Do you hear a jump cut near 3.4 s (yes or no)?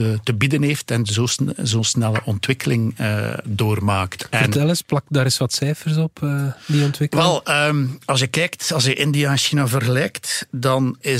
yes